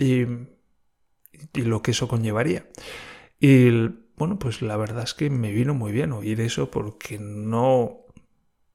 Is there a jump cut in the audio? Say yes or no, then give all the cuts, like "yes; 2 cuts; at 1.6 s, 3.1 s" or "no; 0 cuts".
no; 0 cuts